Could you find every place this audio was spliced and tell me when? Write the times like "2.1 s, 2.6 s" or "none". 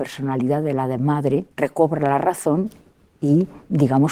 1.5 s